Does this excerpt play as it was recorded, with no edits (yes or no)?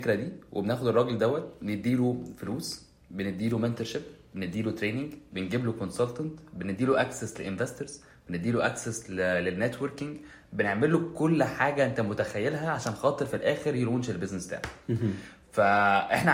yes